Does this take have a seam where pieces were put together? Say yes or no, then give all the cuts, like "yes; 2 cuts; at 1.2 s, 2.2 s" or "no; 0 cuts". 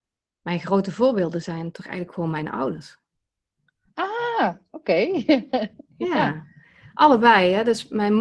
no; 0 cuts